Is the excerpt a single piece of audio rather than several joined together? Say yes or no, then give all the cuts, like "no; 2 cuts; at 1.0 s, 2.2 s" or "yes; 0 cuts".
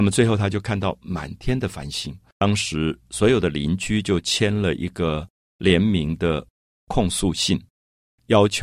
no; 1 cut; at 2.3 s